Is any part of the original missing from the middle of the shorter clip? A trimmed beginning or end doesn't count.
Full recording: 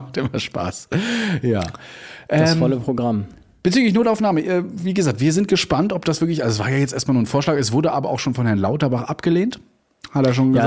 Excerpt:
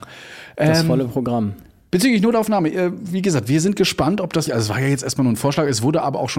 yes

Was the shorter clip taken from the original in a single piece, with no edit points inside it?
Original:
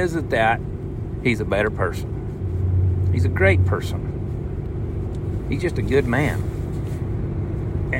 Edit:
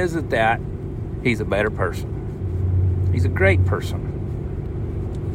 yes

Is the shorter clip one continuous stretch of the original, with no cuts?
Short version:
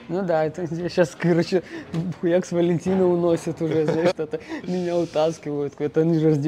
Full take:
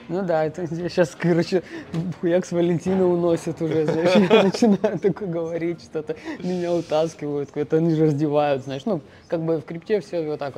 no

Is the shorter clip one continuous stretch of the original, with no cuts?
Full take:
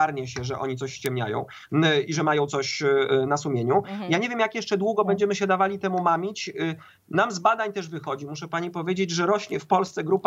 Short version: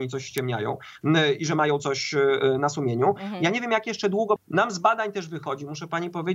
no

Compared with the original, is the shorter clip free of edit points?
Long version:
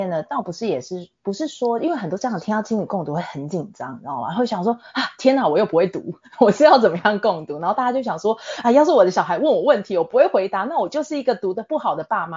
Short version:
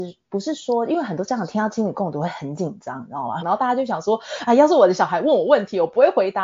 no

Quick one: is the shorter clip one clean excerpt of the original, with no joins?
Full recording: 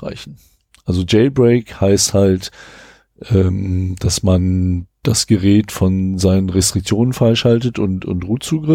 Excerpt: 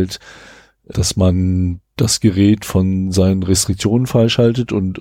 no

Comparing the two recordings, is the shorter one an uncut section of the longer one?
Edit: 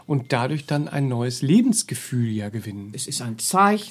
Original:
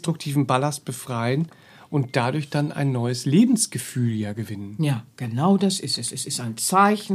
no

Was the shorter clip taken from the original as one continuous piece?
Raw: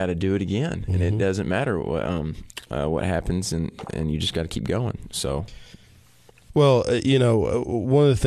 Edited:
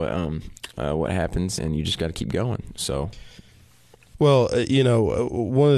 no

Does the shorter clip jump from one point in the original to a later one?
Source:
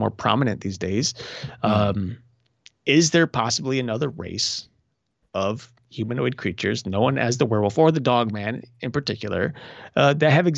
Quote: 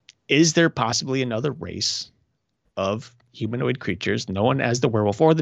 no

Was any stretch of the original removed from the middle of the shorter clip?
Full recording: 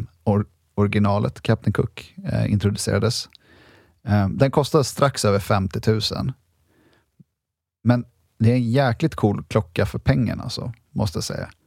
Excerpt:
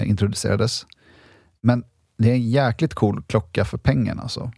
yes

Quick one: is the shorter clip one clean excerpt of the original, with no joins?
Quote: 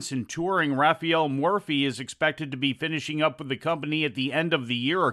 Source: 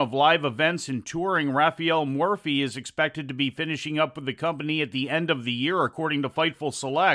yes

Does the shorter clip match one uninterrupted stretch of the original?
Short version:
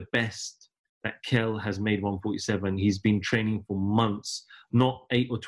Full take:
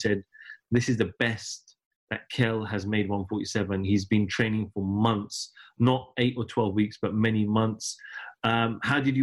yes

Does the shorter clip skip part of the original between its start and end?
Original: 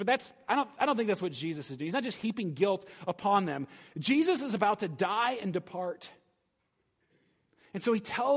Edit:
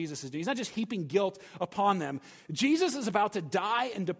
no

